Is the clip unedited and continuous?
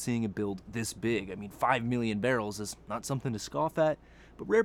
yes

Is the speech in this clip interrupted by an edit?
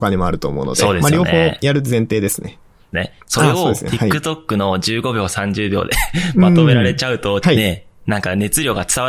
yes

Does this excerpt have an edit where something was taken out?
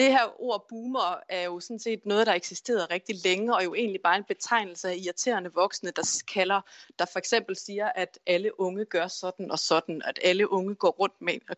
no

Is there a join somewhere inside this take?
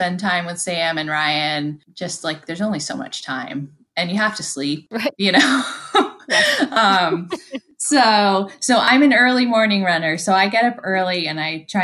no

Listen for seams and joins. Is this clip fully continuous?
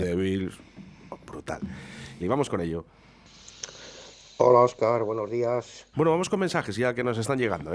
no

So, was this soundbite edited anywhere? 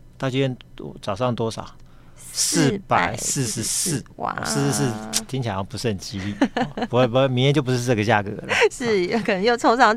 no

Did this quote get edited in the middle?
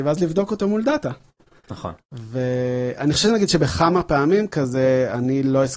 no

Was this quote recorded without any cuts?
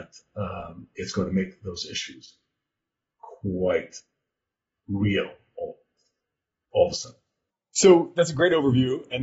yes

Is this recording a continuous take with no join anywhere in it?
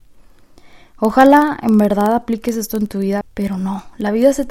no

